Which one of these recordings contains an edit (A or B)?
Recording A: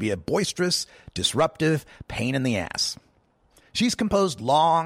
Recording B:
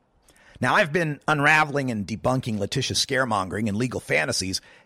A